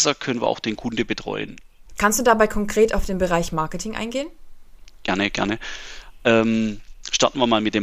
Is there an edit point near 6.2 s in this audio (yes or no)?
no